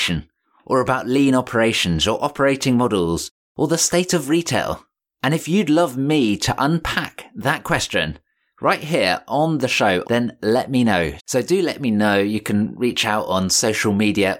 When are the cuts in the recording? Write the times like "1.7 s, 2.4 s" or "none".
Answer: 10.0 s, 11.2 s